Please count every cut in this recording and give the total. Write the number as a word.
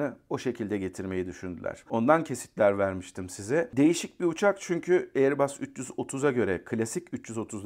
one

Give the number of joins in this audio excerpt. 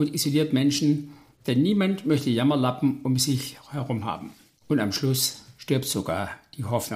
one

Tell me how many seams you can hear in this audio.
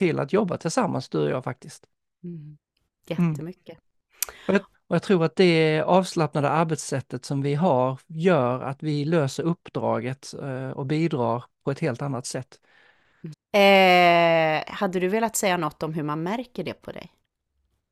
two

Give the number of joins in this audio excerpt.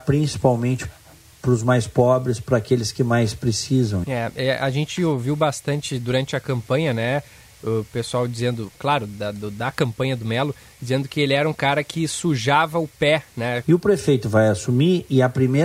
three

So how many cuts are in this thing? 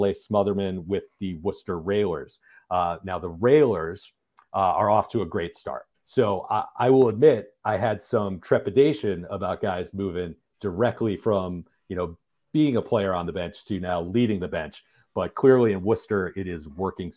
one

